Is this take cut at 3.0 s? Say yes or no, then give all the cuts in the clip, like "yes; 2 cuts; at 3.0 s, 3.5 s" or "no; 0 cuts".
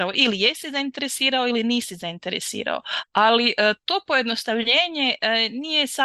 yes; 1 cut; at 3.0 s